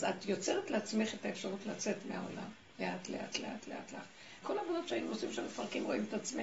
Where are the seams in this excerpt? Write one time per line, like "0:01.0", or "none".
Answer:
0:03.3
0:04.4